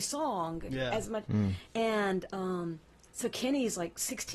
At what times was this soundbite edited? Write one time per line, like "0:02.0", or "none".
0:01.3